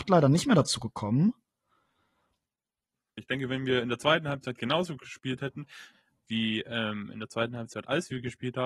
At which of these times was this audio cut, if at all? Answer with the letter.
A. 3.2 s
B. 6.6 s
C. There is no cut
A